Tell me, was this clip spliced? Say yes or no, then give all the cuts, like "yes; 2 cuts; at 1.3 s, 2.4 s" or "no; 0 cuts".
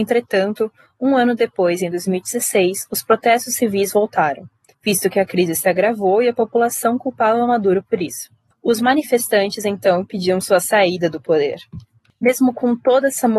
no; 0 cuts